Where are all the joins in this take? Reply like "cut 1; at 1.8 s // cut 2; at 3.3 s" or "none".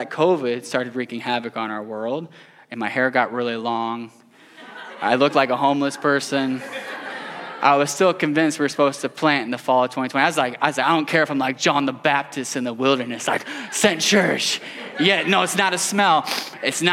none